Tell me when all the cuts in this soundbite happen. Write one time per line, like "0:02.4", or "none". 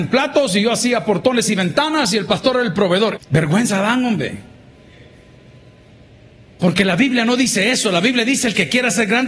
0:03.2